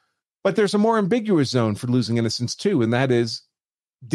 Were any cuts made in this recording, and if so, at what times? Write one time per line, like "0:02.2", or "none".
none